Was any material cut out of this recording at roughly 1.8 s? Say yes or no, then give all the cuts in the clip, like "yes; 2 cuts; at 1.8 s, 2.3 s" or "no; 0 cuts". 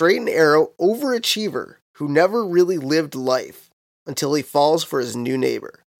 yes; 1 cut; at 1.8 s